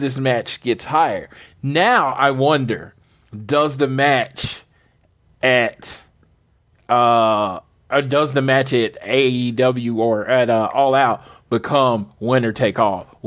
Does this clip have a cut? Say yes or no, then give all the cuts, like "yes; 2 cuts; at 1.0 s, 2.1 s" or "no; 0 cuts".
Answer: no; 0 cuts